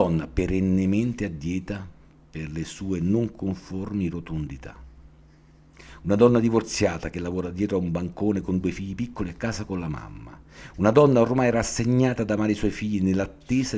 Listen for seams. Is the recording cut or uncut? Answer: uncut